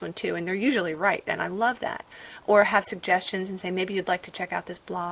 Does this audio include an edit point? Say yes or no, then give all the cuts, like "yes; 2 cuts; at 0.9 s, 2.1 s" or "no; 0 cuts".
no; 0 cuts